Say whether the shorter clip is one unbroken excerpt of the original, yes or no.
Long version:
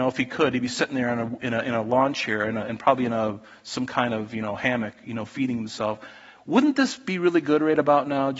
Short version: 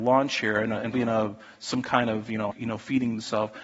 no